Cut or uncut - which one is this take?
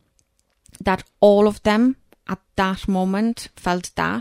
uncut